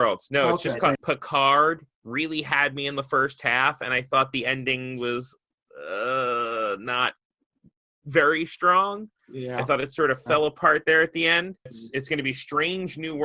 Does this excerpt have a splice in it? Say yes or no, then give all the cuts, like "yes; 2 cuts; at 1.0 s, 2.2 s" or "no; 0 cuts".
yes; 2 cuts; at 0.9 s, 11.7 s